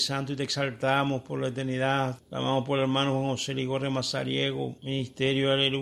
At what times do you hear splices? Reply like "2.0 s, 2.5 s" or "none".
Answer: 2.2 s, 4.8 s